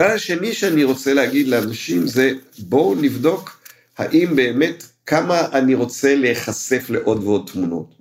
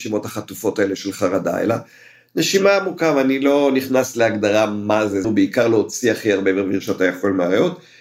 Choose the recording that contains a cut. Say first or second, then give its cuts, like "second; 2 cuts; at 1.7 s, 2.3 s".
second; 1 cut; at 5.2 s